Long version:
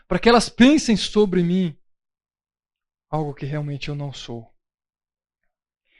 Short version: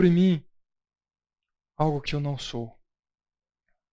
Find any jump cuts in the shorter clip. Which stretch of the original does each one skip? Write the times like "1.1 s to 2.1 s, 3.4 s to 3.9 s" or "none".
3.4 s to 3.8 s